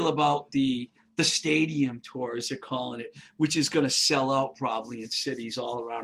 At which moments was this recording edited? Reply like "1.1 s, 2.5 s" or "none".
none